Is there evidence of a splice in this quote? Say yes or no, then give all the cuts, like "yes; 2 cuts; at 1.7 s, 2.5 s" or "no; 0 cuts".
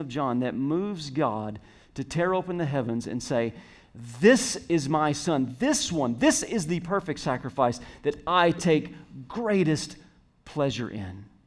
no; 0 cuts